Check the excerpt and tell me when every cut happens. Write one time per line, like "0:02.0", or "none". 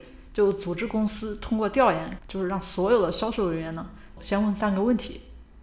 0:02.2
0:04.2